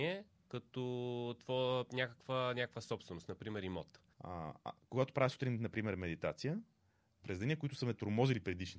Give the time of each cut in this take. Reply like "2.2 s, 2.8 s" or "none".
4.1 s, 7.2 s